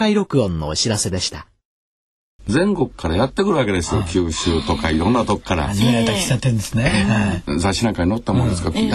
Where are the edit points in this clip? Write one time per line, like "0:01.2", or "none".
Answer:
0:02.4

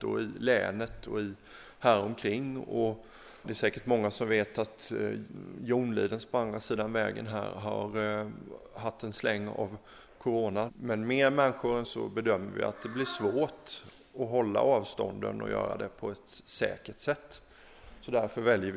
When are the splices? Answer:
0:03.4
0:10.7
0:11.8

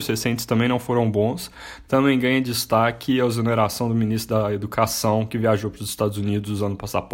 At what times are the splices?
0:01.8

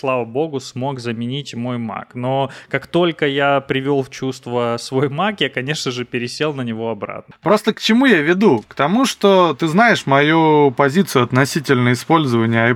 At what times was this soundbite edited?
none

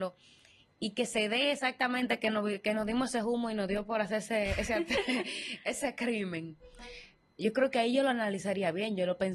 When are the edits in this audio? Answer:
none

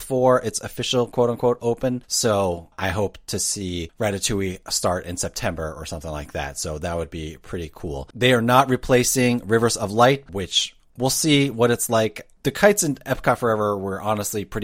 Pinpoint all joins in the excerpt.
0:08.1
0:10.3

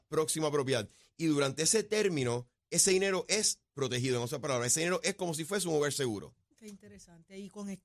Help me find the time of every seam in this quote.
0:06.5

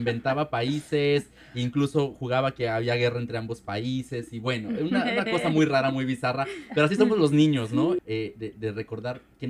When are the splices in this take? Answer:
0:08.0

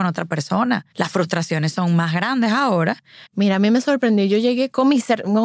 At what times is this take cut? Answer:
0:00.9
0:03.3

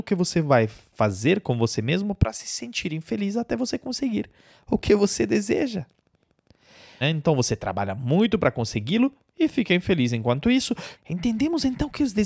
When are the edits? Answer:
0:07.0
0:10.9

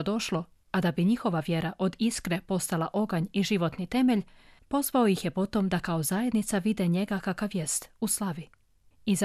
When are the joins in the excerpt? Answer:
none

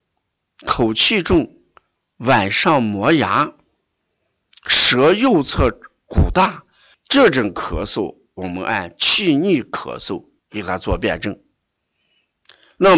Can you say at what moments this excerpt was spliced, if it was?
0:06.9
0:10.4

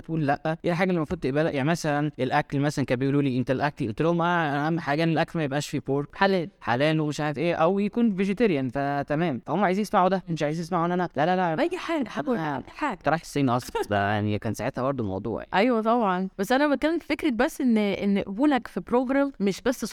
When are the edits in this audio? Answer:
none

